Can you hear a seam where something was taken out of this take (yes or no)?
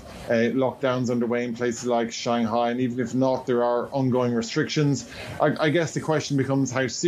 no